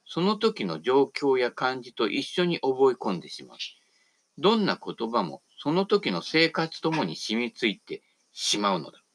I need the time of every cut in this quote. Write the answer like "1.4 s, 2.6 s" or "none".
6.8 s